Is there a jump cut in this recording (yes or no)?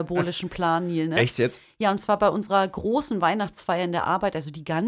no